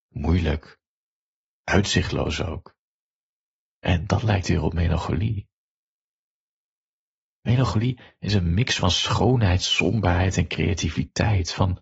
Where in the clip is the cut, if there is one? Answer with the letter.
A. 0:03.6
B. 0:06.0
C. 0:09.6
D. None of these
A